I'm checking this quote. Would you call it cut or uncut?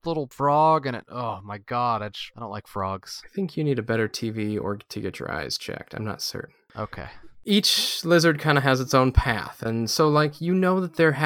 uncut